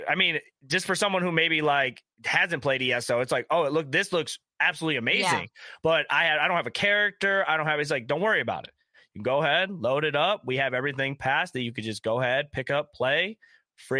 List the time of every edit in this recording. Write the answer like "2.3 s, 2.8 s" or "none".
none